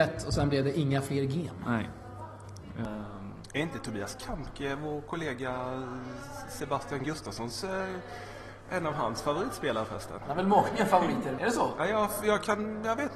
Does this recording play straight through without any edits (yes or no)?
no